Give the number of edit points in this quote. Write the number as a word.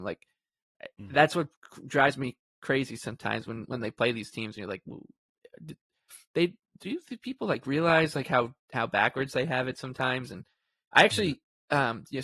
zero